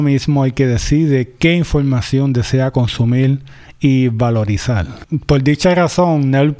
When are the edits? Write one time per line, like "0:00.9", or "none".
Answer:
none